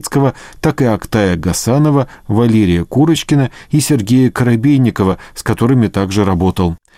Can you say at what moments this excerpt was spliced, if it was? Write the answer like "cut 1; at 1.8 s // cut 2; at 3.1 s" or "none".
none